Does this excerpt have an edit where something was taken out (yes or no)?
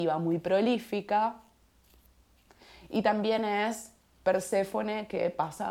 no